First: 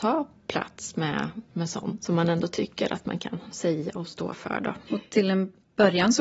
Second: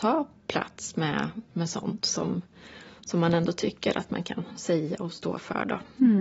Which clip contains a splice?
first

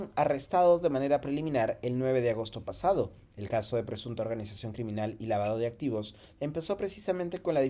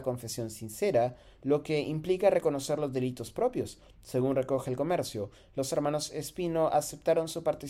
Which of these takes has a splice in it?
first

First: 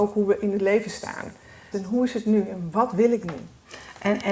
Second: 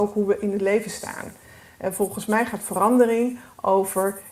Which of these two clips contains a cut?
first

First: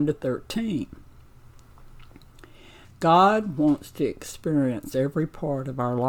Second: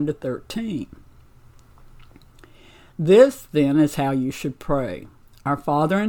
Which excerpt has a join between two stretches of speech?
first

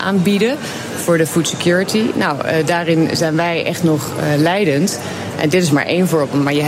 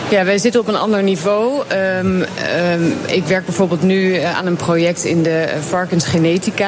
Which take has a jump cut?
first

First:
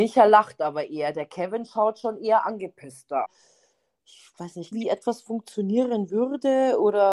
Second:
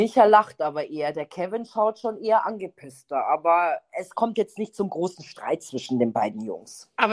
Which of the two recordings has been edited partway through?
first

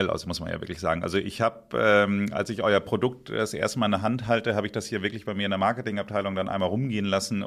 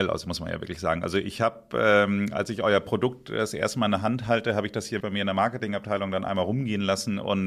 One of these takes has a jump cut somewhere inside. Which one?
second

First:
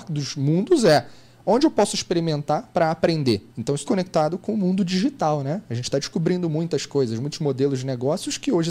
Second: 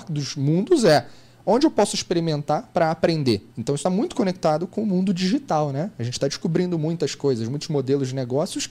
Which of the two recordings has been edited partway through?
first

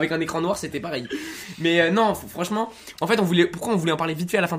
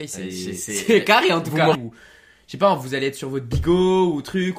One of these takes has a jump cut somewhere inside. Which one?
second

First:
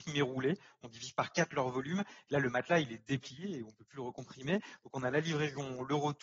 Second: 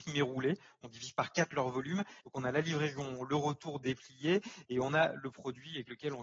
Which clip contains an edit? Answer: second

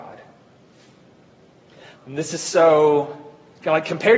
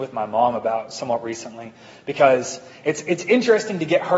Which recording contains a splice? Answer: first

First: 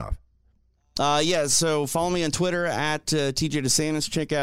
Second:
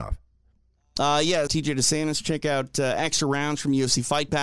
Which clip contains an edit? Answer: second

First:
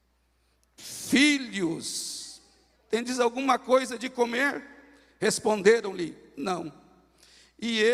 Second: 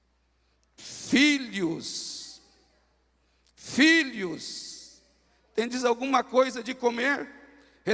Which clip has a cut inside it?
first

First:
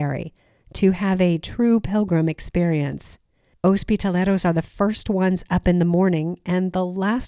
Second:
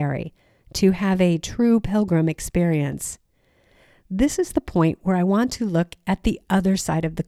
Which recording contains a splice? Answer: first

